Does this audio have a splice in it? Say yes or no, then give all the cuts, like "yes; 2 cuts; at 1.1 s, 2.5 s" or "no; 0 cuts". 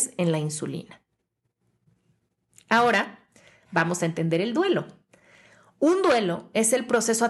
no; 0 cuts